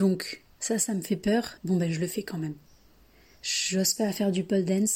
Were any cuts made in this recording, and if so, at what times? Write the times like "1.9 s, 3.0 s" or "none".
1.6 s